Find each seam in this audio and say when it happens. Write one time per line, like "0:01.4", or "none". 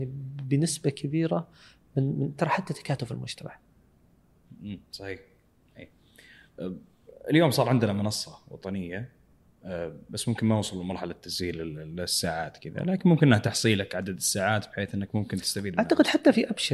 none